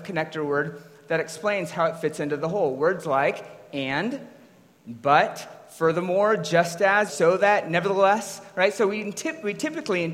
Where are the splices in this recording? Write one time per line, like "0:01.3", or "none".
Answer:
0:07.1